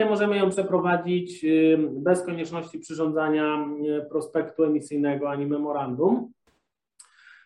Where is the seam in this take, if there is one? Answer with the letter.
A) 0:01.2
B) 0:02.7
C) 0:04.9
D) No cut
D